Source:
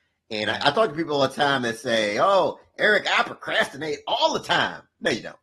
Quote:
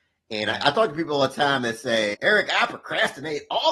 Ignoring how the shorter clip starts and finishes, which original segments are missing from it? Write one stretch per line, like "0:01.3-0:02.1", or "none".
0:02.1-0:02.7